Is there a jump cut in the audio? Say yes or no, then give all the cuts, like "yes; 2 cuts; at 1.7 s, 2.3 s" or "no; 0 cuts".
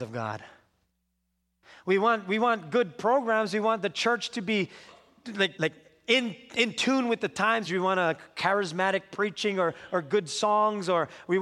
yes; 2 cuts; at 5.5 s, 7.6 s